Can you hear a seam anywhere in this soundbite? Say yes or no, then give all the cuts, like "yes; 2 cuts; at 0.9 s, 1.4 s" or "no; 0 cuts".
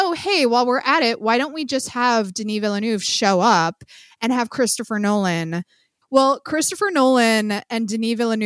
yes; 1 cut; at 6.0 s